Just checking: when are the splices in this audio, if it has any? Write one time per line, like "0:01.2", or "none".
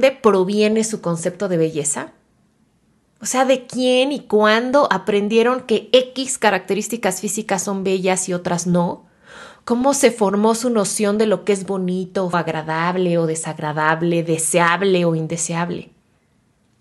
0:12.3